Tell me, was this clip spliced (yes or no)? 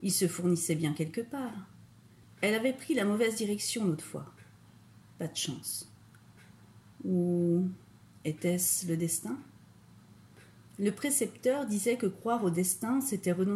yes